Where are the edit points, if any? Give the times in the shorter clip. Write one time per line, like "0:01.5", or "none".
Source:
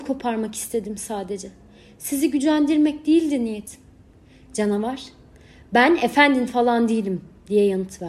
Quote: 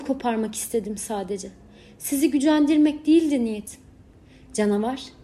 none